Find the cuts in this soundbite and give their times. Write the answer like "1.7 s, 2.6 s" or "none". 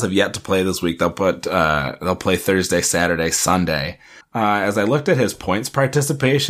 4.2 s